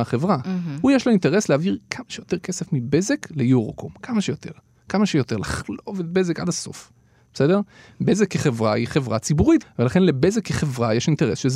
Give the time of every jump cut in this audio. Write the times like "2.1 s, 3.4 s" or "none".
9.6 s